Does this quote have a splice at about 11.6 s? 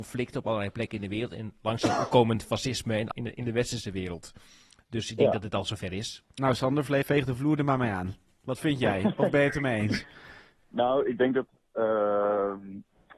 no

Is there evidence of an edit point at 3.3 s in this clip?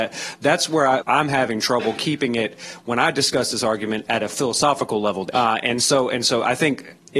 no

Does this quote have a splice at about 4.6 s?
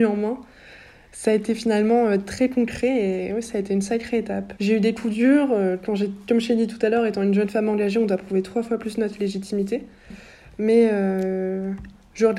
yes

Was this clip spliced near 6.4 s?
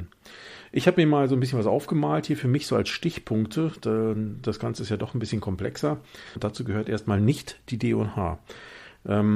yes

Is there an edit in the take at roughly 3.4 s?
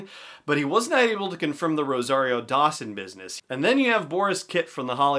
yes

